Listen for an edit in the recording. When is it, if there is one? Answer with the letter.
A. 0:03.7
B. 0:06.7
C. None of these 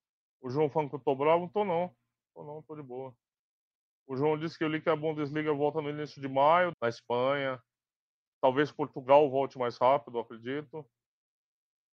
B